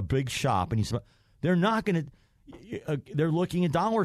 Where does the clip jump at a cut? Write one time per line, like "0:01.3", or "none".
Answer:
0:00.9